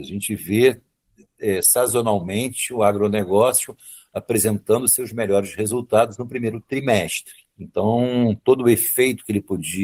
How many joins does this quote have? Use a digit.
0